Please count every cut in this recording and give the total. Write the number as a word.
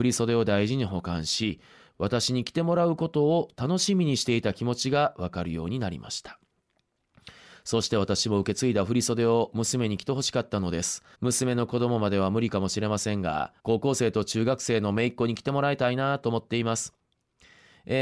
two